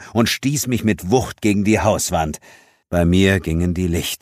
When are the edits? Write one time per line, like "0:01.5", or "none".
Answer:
0:02.8